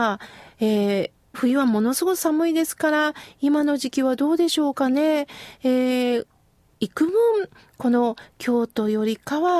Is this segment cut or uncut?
cut